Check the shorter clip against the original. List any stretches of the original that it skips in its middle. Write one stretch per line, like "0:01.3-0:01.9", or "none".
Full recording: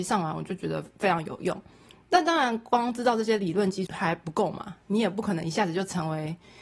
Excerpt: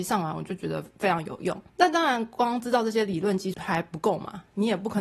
0:01.7-0:02.0